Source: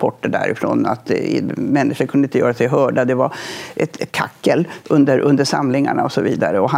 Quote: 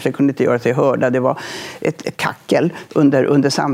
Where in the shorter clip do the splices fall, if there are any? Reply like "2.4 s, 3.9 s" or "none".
none